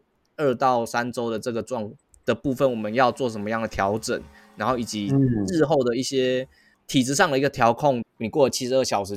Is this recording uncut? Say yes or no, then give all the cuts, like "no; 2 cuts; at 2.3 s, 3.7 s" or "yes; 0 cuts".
no; 1 cut; at 8.0 s